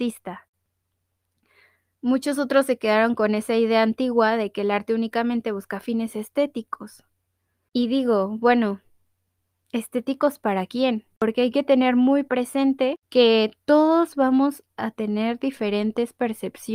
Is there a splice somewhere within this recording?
no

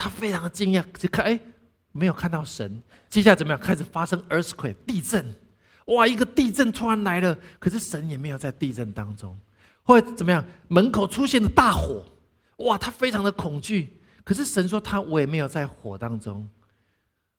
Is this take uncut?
yes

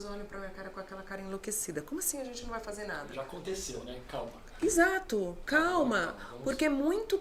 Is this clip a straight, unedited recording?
yes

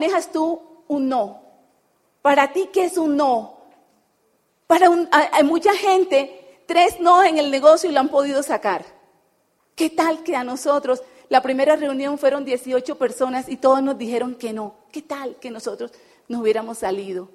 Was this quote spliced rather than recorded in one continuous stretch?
yes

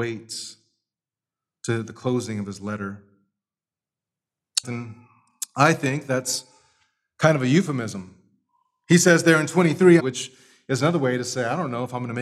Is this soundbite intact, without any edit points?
no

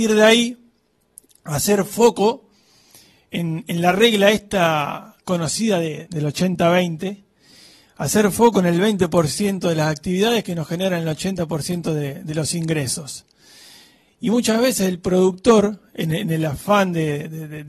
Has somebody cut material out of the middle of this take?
yes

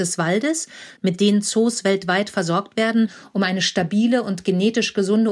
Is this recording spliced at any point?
yes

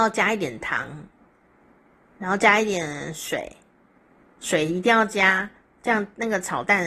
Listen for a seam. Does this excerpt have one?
no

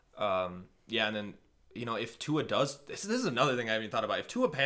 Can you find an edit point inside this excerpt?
no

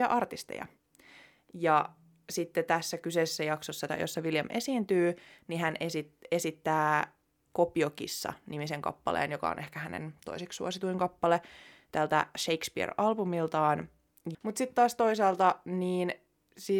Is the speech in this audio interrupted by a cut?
yes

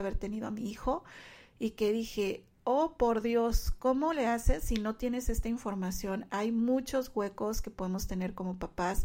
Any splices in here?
no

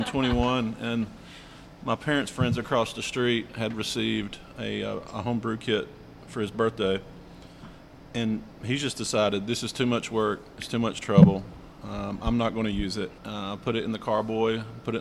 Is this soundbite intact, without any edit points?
no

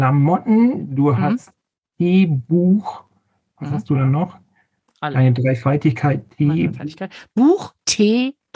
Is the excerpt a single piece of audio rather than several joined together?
yes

